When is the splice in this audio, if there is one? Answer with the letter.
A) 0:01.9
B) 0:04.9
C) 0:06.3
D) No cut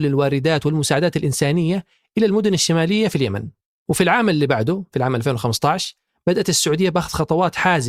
D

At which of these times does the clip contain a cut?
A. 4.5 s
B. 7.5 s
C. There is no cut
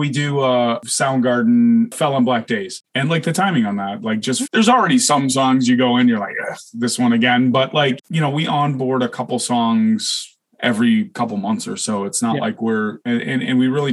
A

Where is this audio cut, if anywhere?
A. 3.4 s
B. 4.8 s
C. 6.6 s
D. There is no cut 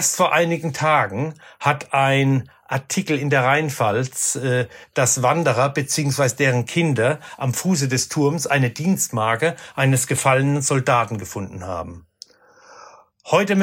B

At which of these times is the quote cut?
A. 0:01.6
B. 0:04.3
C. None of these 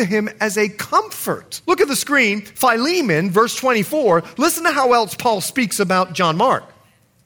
A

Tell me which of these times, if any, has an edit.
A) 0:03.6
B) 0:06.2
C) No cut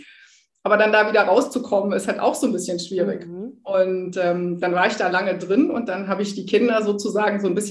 C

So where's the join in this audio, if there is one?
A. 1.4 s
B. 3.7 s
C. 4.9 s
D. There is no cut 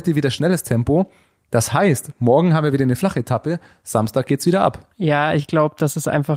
C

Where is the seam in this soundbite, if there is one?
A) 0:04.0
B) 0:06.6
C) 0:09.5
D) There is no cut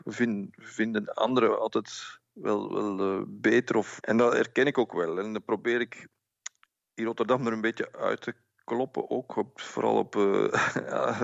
A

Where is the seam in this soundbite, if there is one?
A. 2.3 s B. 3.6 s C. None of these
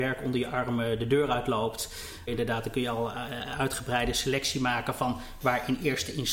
A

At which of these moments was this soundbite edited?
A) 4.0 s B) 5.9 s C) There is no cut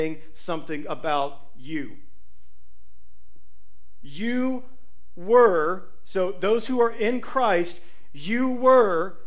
A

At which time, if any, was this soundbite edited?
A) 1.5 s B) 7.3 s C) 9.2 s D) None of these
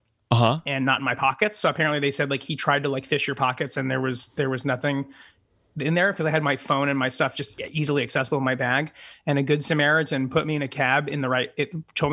D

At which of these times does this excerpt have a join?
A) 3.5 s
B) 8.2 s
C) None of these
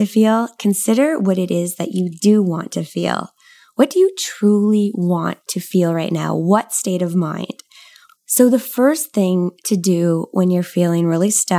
B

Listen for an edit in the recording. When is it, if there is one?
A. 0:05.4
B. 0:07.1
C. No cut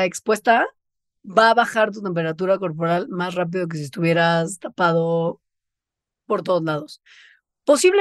C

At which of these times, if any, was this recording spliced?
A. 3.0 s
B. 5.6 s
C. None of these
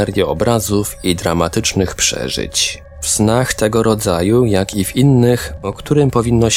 B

